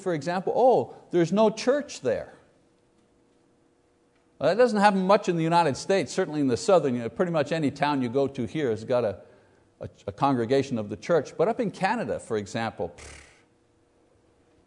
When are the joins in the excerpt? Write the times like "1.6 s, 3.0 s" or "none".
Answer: none